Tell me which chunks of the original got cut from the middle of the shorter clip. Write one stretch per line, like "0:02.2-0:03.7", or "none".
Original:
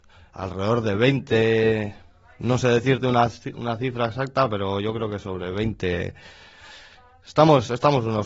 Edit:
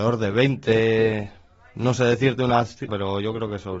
0:03.5-0:04.5

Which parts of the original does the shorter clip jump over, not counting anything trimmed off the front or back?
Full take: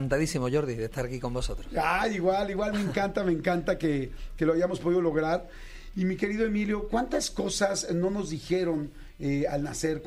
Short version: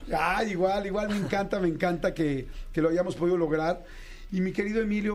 none

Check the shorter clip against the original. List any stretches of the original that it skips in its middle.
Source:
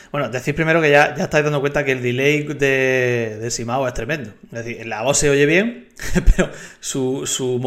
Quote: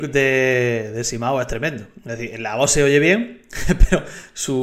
none

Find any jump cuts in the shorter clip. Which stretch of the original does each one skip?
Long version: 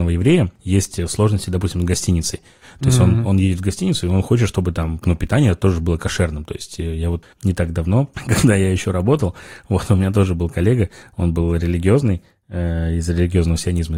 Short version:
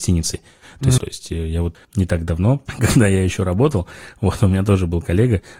0:03.0-0:06.5

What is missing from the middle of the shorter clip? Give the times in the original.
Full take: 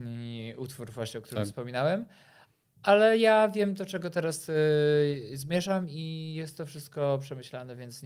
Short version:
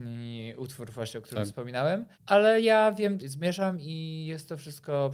0:02.1-0:02.7
0:03.8-0:05.3

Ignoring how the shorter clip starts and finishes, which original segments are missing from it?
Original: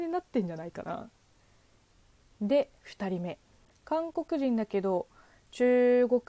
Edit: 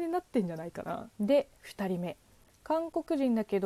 0:01.1-0:02.4

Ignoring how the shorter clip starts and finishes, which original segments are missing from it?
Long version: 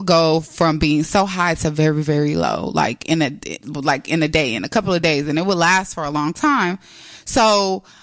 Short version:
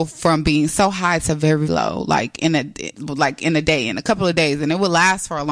0:02.0-0:02.3

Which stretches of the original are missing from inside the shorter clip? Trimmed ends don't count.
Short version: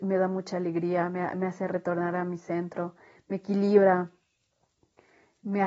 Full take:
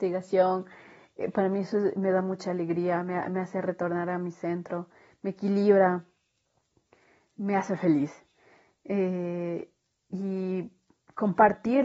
none

